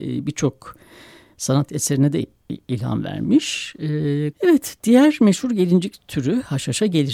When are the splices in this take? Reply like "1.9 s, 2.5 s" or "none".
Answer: 4.3 s